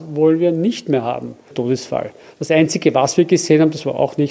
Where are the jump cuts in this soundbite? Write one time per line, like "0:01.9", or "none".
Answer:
0:01.5